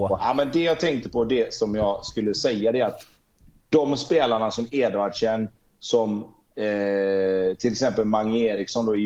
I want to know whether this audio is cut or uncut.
uncut